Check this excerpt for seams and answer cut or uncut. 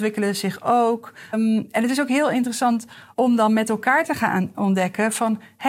cut